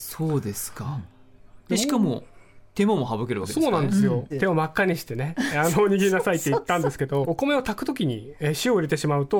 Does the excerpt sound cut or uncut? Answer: cut